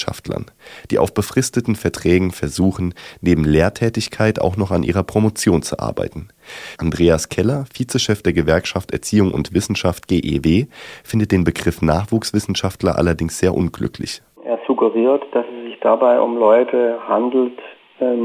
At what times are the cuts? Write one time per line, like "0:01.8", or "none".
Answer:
none